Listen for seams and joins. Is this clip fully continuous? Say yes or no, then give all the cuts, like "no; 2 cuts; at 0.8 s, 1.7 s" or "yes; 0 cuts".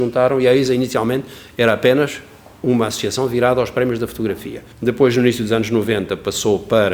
no; 1 cut; at 4.7 s